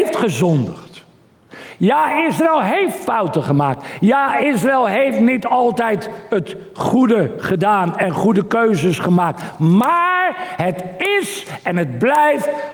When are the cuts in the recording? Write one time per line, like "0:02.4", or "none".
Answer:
none